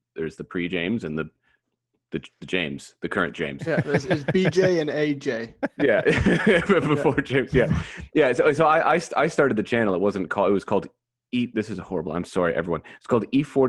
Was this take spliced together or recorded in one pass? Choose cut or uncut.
uncut